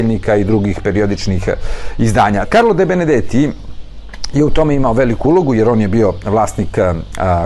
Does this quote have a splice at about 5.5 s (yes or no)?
no